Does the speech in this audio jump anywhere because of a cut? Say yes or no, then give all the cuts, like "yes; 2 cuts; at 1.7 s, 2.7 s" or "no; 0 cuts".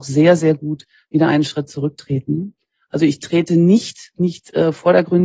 yes; 2 cuts; at 2.8 s, 4.1 s